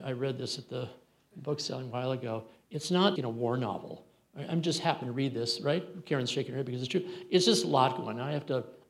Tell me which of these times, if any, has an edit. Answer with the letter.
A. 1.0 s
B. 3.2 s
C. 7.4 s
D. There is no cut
B